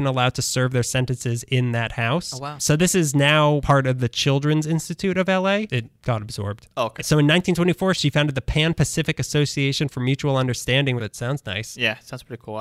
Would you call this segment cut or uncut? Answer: cut